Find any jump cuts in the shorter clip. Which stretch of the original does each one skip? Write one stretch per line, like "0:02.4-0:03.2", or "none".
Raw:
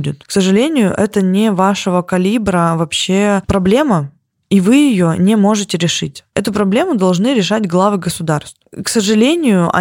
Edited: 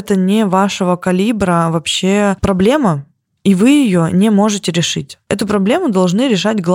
none